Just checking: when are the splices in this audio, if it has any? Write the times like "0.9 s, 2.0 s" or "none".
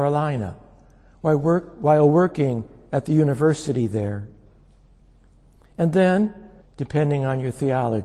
6.6 s